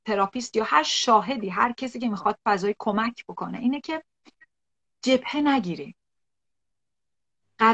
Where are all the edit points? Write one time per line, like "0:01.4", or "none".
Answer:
none